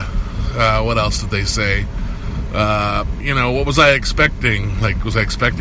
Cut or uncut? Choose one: cut